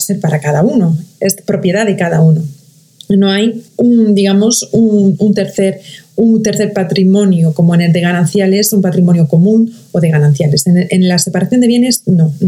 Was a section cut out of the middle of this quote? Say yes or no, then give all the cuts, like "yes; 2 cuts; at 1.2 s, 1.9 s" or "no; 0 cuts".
yes; 1 cut; at 3.7 s